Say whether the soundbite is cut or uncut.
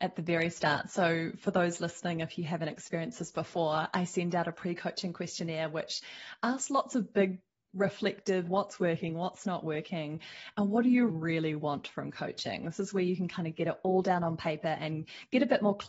cut